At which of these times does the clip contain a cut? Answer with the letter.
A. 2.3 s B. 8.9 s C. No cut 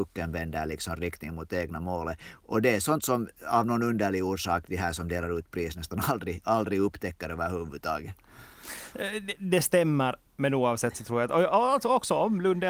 C